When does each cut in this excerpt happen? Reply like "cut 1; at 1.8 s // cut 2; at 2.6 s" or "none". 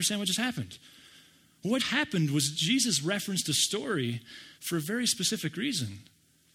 cut 1; at 1.8 s // cut 2; at 4.6 s